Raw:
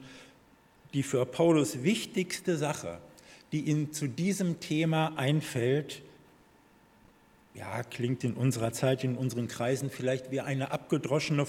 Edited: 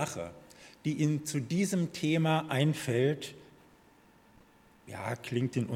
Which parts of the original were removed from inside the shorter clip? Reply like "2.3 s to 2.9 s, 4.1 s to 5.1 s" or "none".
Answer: none